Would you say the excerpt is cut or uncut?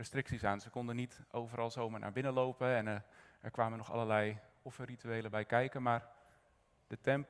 uncut